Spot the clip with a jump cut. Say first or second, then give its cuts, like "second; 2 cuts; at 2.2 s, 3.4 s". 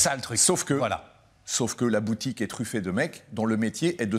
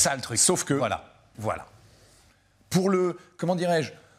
second; 1 cut; at 1.3 s